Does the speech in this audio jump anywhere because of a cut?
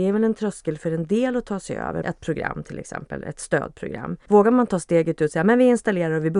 yes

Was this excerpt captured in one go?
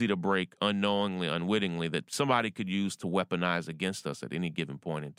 yes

